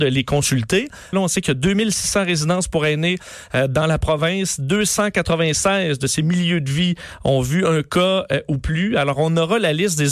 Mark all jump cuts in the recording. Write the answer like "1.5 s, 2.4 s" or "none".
1.1 s